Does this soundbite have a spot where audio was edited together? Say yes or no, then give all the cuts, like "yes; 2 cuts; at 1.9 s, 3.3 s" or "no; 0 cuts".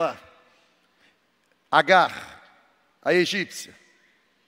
no; 0 cuts